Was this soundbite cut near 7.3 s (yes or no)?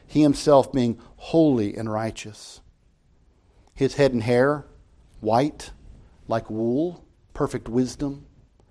yes